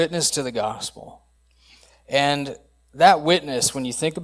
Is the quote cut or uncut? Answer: uncut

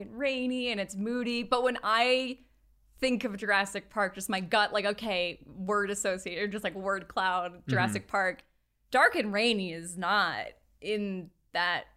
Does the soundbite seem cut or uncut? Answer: uncut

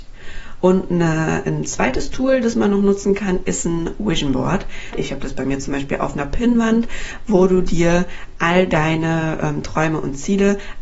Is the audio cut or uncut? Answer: cut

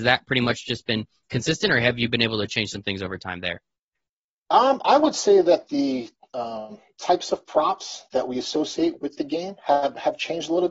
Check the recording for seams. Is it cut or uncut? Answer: uncut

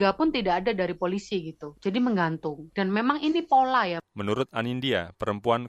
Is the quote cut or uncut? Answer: uncut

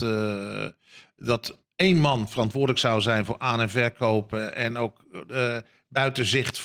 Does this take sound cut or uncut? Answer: uncut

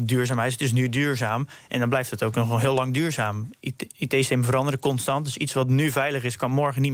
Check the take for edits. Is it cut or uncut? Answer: uncut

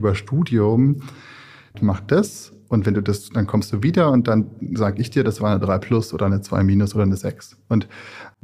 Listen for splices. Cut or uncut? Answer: cut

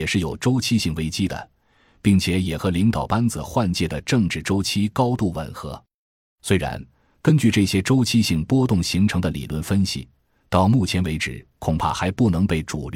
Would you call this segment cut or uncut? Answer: uncut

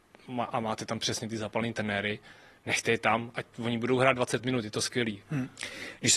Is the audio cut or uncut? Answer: cut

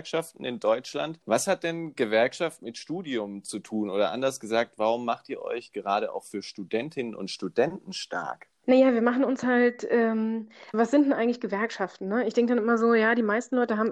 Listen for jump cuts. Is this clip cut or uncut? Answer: cut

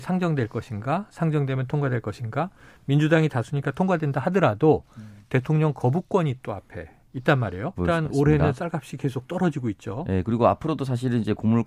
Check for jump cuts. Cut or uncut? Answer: cut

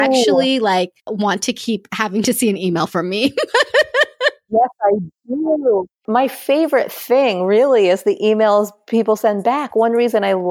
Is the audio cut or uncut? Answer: uncut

